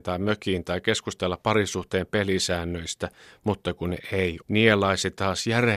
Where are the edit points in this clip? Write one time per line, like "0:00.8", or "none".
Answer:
0:04.4